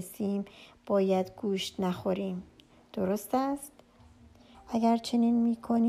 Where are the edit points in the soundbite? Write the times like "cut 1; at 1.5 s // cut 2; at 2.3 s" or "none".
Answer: cut 1; at 4.5 s